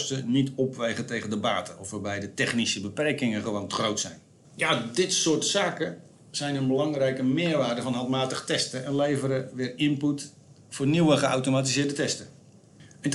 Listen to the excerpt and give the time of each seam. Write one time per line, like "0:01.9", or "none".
0:04.4